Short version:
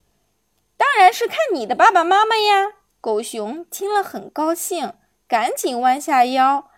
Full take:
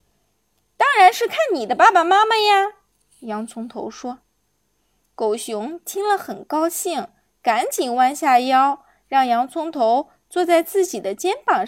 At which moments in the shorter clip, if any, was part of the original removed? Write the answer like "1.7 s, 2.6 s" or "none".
2.9 s